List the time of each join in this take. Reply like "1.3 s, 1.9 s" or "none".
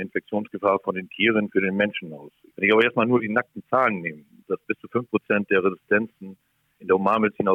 2.5 s, 4.4 s